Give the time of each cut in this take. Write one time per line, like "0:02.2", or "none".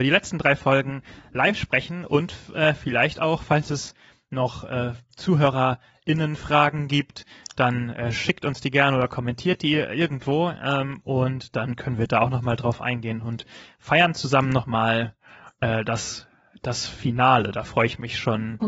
none